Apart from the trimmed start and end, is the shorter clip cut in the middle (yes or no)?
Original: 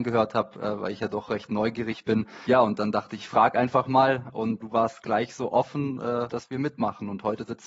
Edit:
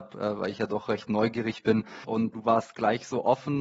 yes